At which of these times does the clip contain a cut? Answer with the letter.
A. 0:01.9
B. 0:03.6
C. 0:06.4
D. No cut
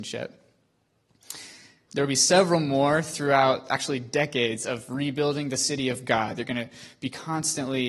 A